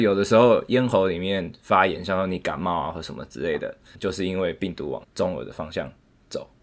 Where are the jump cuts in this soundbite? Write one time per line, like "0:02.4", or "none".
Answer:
0:03.9
0:05.0